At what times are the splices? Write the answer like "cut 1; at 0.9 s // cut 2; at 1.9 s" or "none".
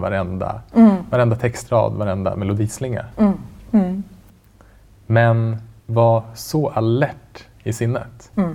cut 1; at 3.7 s // cut 2; at 5.8 s

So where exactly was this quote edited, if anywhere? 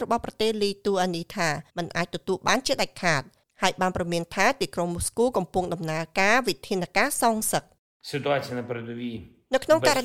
cut 1; at 1.7 s

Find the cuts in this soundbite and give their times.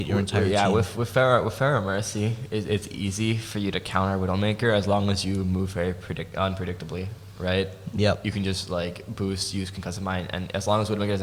none

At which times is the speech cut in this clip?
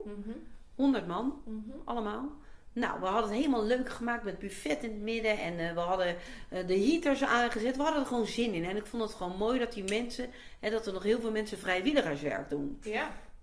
none

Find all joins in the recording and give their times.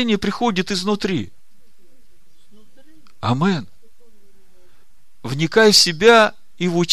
none

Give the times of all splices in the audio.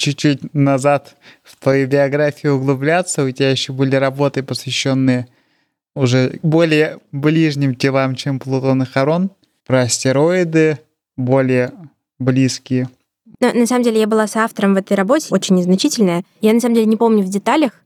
cut 1; at 13.3 s // cut 2; at 15.3 s

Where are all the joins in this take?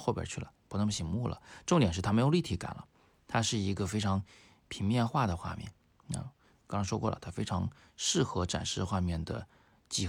none

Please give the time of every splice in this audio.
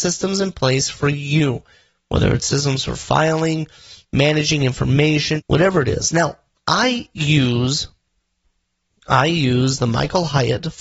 cut 1; at 5.4 s

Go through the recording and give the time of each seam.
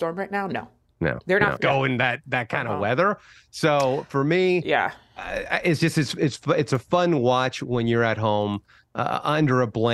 cut 1; at 1.6 s

